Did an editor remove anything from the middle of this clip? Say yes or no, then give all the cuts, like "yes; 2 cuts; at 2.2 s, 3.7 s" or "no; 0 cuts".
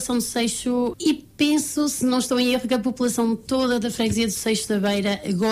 yes; 1 cut; at 0.9 s